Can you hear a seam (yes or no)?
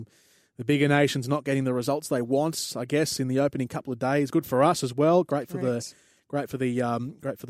yes